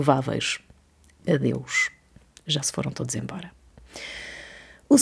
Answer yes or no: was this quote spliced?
no